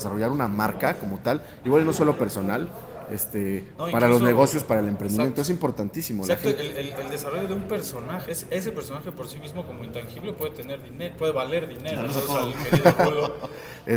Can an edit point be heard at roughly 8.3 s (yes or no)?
yes